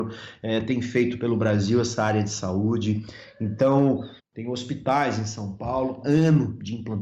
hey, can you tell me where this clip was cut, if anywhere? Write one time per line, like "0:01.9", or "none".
0:04.2
0:06.0